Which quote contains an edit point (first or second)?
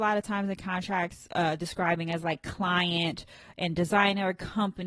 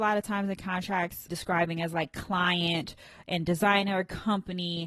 second